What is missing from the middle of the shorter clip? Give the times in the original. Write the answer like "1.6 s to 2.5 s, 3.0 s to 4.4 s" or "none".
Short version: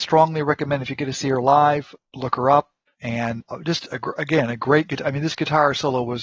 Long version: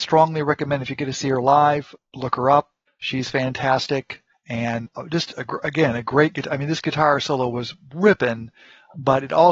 2.9 s to 4.4 s